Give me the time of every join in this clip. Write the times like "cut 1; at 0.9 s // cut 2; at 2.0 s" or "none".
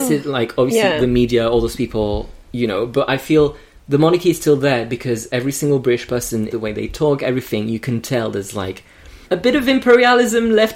cut 1; at 6.5 s // cut 2; at 9.2 s